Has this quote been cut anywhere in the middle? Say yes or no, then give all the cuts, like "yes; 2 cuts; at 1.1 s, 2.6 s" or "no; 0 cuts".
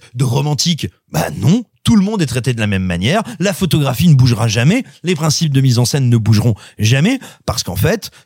no; 0 cuts